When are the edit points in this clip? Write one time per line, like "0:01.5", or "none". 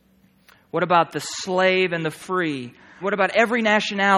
0:03.0